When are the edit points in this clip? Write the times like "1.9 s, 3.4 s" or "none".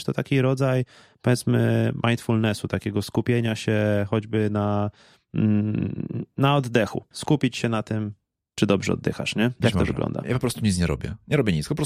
7.1 s